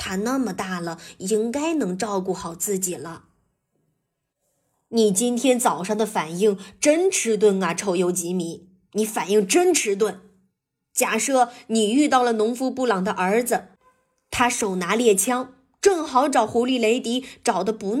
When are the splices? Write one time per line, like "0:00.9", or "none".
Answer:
none